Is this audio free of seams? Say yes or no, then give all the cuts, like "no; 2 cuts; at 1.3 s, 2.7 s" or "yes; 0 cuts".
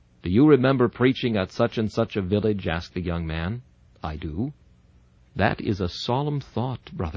no; 1 cut; at 5.2 s